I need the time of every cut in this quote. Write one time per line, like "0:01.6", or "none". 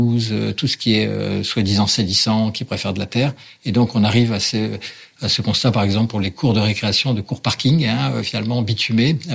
none